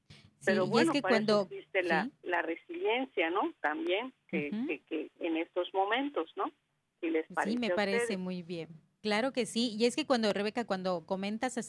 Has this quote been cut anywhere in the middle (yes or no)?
yes